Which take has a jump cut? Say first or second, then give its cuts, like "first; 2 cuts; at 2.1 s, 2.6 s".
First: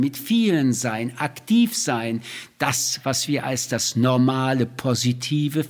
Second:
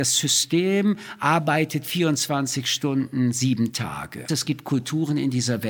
second; 1 cut; at 4.3 s